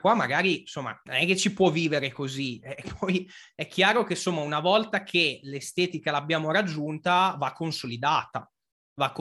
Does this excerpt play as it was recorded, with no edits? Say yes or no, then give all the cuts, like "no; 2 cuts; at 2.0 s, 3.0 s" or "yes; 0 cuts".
no; 2 cuts; at 1.0 s, 2.8 s